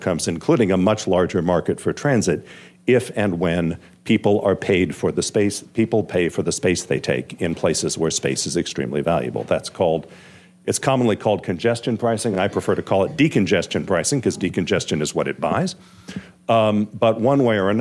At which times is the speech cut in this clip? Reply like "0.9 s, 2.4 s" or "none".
none